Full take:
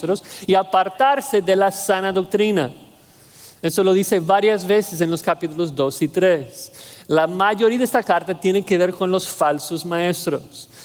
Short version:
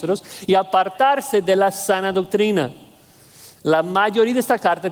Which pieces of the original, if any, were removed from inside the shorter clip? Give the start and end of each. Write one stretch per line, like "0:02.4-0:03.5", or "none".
0:03.6-0:07.0